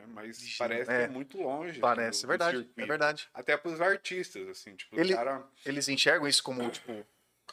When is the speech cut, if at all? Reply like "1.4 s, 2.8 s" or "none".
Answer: none